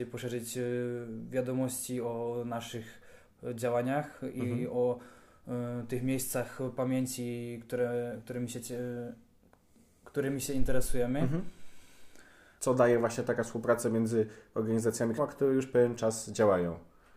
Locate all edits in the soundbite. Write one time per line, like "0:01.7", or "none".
0:12.6
0:15.2

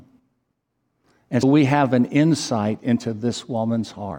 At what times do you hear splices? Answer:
0:01.4

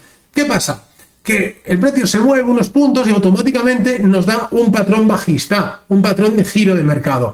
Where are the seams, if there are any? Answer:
none

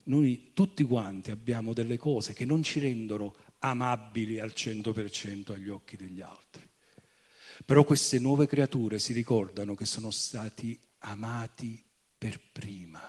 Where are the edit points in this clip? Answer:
none

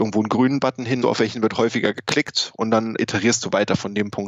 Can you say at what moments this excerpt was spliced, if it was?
0:01.0
0:03.0

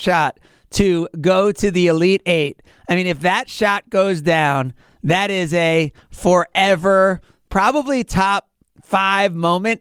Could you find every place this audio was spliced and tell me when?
0:07.5

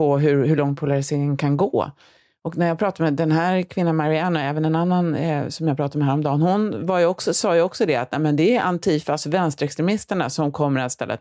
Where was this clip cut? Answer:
none

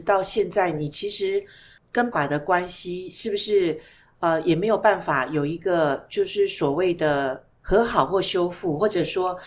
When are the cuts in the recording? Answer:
0:02.1

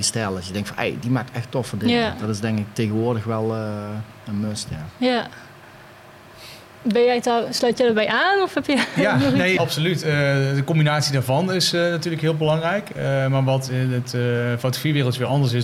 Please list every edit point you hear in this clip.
0:09.6

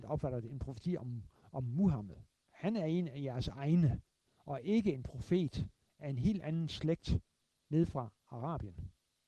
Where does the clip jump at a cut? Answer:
0:02.4
0:04.3

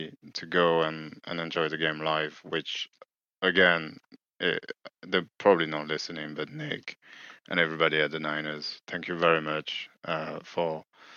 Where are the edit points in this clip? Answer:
none

